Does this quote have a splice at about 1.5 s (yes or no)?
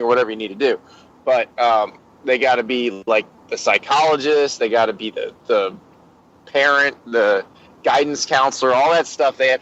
yes